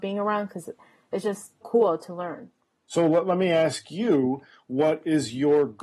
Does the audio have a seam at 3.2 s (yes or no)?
no